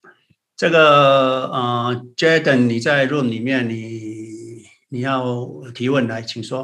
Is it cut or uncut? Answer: uncut